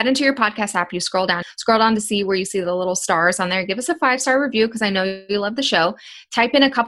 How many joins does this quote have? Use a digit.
1